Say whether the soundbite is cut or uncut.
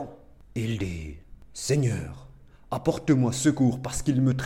uncut